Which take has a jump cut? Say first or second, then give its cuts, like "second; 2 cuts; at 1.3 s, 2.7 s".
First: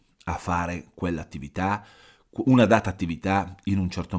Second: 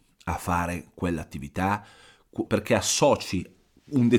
second; 1 cut; at 2.5 s